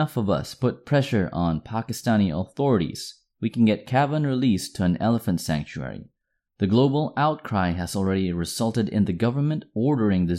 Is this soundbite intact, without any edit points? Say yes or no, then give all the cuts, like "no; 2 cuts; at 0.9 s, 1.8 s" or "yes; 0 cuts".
yes; 0 cuts